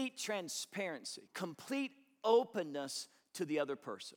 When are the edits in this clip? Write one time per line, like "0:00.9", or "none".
0:01.3